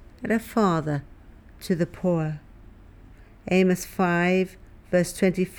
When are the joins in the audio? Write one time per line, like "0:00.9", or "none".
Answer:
none